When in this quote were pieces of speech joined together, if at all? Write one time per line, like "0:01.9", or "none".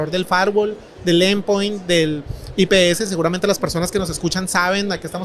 none